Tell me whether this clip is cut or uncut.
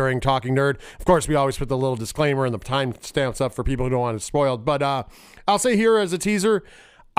uncut